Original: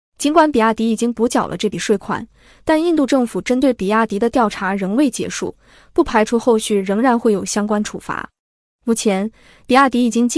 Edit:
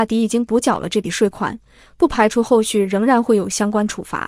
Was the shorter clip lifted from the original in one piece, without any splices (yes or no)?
no